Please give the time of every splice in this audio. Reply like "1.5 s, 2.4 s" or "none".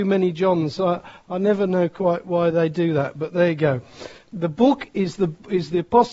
4.2 s